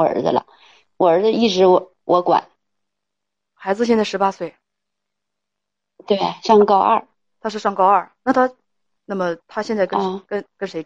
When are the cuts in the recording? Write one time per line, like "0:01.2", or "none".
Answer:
0:03.5
0:09.0